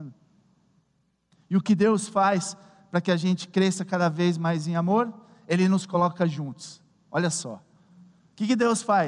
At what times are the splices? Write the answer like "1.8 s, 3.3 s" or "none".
none